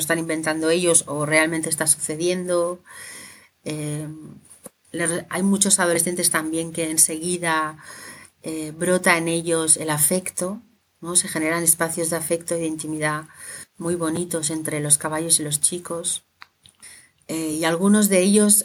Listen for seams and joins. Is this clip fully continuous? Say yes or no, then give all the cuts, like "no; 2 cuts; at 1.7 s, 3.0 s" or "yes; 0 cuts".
yes; 0 cuts